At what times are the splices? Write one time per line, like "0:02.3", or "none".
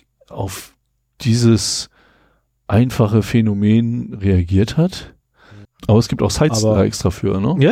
0:05.7